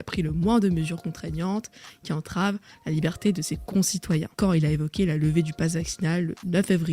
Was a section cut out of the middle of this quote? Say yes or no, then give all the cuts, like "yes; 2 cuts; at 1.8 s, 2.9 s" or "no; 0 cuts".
no; 0 cuts